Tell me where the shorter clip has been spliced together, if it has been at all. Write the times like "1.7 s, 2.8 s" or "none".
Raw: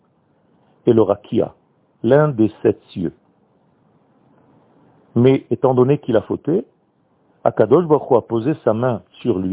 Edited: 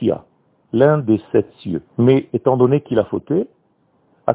1.9 s